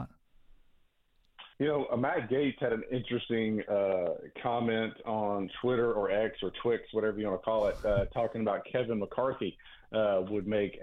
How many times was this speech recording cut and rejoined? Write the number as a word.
one